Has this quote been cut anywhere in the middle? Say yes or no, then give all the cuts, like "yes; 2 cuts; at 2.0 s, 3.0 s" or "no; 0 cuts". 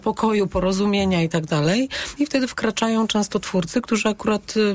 yes; 1 cut; at 2.2 s